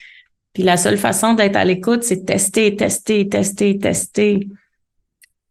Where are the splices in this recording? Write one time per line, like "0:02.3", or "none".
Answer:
none